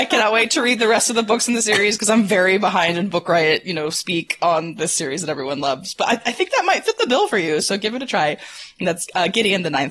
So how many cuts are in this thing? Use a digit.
0